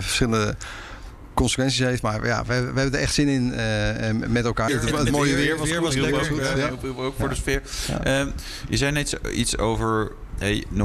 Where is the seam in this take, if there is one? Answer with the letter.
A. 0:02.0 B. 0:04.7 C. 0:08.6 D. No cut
B